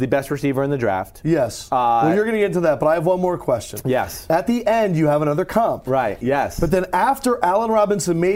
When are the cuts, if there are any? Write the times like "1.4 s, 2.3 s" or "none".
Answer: 6.2 s